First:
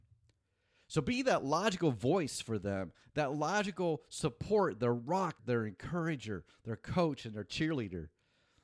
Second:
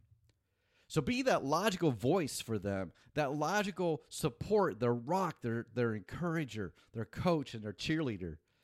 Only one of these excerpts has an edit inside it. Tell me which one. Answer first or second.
first